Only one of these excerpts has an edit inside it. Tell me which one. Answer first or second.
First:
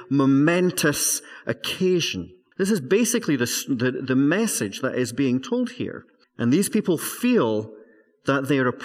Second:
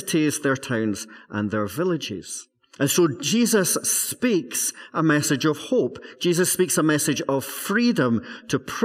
first